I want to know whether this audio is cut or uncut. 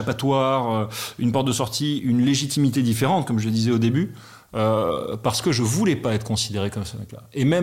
uncut